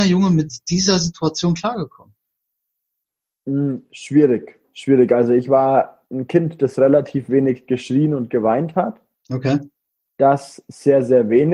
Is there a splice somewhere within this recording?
no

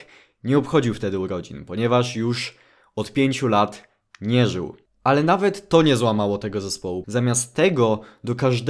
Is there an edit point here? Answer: yes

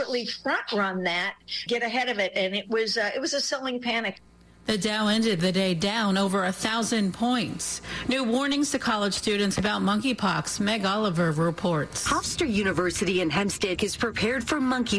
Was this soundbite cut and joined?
yes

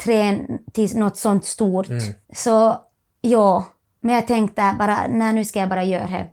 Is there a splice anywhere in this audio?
yes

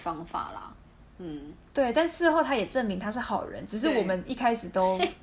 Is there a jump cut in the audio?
no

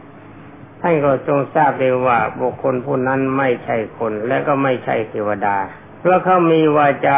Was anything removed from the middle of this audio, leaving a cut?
yes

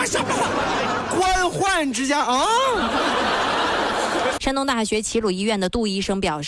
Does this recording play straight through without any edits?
no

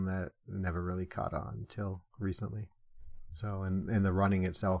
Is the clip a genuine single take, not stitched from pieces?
yes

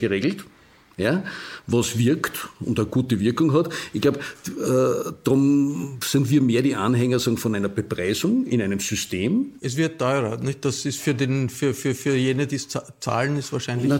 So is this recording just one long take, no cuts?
yes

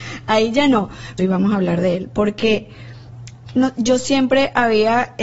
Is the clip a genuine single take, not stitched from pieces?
no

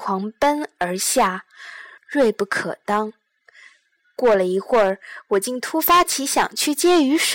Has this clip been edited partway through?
yes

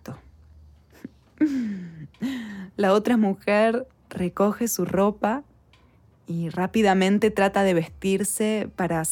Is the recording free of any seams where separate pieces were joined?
yes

